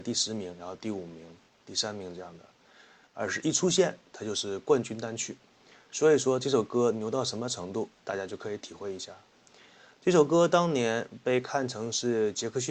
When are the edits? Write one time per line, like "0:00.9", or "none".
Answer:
none